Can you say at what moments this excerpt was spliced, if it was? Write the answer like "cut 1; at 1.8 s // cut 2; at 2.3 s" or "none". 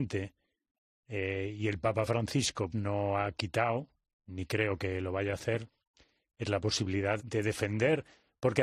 cut 1; at 2.7 s // cut 2; at 7.2 s